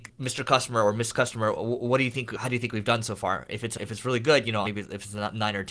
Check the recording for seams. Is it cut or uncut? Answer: cut